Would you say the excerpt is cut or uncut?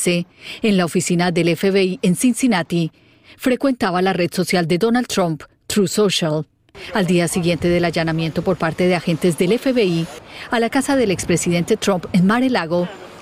uncut